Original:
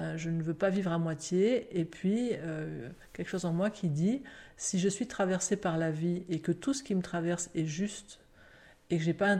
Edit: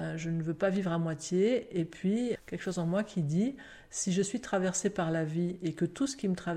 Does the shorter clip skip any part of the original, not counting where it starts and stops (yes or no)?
yes